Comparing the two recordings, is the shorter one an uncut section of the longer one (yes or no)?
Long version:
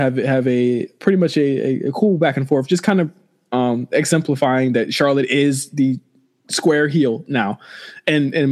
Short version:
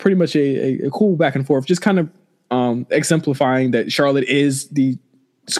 yes